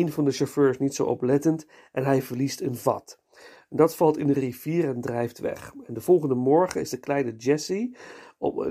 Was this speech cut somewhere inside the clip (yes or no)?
no